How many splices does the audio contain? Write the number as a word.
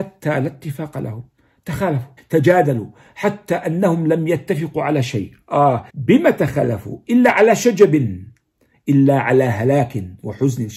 two